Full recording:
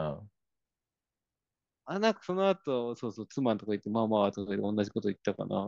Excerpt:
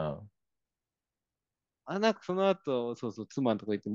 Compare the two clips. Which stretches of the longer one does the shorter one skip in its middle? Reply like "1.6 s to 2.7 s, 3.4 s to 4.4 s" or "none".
none